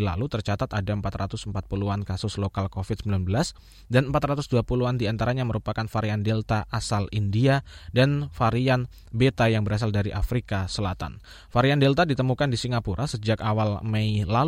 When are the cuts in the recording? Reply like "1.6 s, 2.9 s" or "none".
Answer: none